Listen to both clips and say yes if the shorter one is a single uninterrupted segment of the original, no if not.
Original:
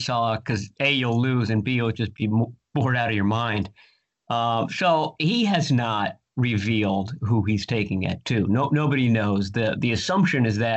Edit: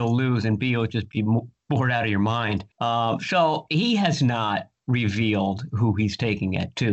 no